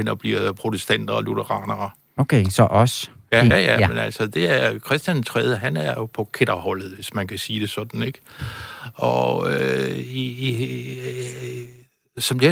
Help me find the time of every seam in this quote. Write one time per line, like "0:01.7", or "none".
0:03.5